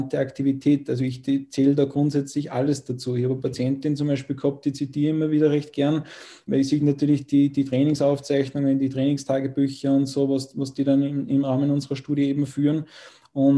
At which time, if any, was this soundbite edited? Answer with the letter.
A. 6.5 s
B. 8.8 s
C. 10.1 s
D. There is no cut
A